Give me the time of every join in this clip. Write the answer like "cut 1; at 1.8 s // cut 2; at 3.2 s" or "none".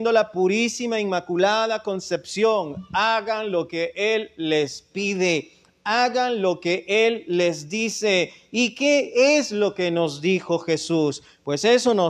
none